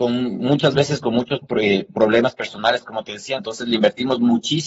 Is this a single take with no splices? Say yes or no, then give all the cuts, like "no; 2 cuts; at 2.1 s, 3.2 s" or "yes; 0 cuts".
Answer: no; 1 cut; at 3.4 s